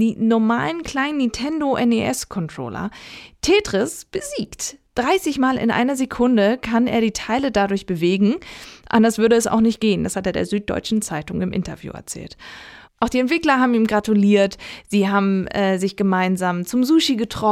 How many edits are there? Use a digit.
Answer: 0